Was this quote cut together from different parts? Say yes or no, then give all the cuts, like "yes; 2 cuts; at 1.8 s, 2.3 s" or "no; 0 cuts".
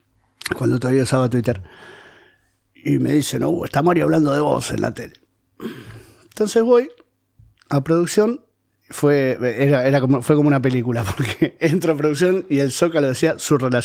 no; 0 cuts